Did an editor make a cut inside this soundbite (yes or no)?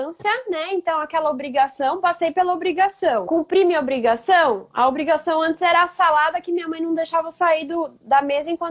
no